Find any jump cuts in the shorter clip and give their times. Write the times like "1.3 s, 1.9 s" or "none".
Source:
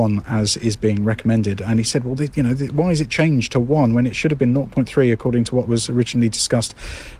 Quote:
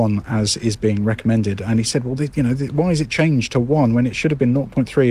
none